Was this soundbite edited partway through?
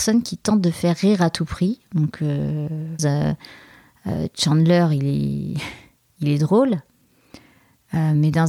yes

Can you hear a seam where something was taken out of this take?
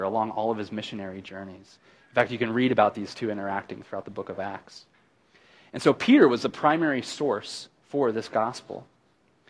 no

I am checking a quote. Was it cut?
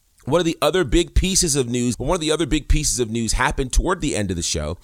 yes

